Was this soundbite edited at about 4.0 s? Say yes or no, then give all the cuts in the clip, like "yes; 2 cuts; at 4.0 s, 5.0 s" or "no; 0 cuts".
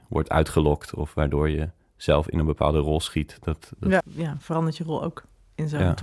yes; 1 cut; at 4.0 s